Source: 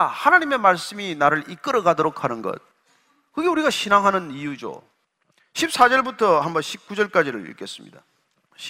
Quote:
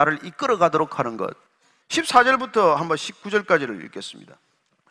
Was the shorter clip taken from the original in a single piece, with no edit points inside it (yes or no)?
no